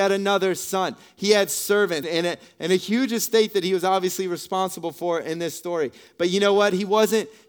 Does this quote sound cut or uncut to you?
cut